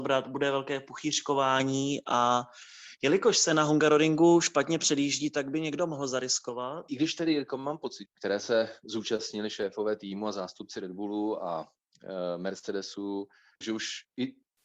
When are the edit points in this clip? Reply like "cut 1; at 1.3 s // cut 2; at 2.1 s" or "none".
cut 1; at 6.9 s // cut 2; at 8.1 s // cut 3; at 13.6 s